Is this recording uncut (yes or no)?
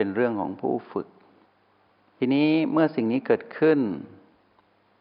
yes